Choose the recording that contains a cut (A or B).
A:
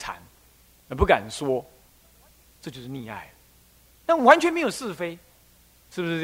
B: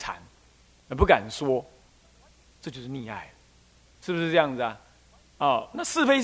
B